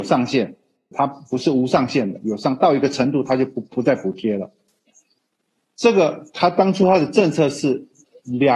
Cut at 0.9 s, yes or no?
yes